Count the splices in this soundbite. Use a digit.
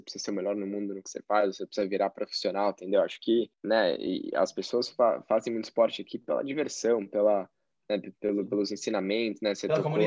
1